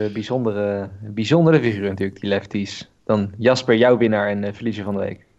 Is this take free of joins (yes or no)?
yes